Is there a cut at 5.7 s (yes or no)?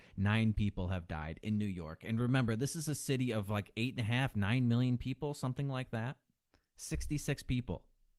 no